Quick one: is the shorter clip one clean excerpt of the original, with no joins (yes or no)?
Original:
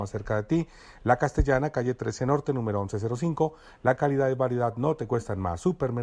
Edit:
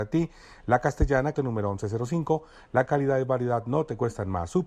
no